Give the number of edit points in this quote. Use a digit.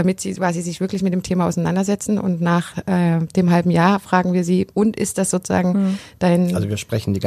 1